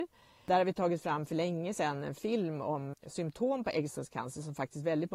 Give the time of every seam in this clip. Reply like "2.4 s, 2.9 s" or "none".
2.9 s